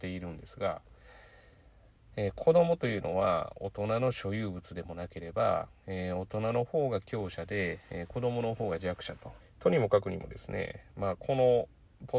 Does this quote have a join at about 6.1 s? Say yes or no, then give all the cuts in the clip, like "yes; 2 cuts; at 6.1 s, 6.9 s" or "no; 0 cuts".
no; 1 cut; at 9.4 s